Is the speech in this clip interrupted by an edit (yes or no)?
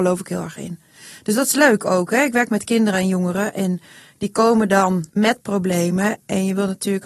yes